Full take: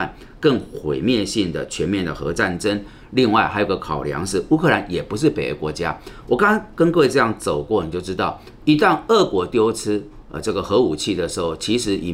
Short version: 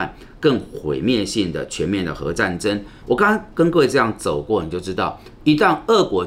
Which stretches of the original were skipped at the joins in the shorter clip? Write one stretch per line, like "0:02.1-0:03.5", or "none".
0:03.0-0:06.2